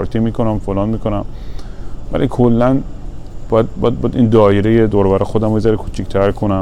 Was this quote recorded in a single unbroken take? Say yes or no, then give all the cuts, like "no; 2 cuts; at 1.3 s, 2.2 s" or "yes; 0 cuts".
yes; 0 cuts